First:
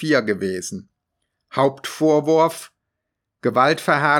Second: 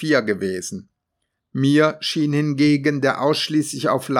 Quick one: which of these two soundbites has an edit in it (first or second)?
second